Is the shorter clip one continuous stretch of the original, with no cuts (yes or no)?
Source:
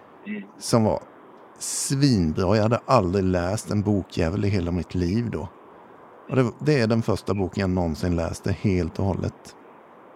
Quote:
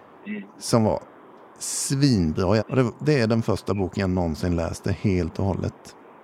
no